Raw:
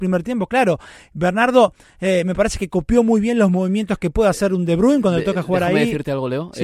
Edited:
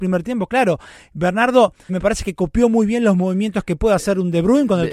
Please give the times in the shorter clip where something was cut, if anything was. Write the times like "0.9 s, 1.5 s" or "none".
1.9 s